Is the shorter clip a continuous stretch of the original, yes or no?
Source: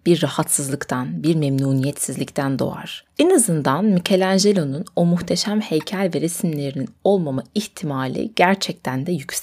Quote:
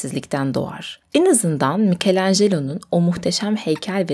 yes